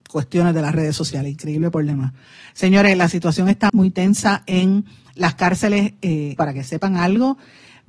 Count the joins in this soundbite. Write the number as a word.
two